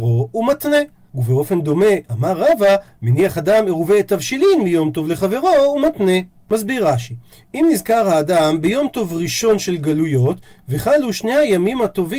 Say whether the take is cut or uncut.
uncut